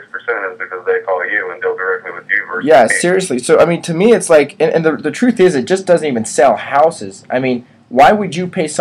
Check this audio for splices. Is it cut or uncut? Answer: uncut